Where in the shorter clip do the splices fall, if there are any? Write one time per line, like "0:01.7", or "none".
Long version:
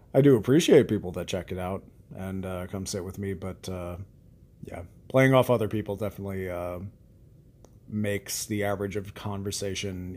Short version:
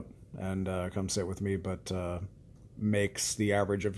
0:02.6